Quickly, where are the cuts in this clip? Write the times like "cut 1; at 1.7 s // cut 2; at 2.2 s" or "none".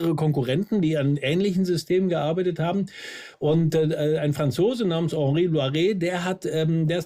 none